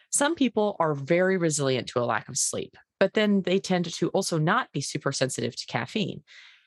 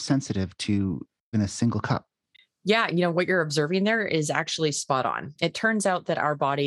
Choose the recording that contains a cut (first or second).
second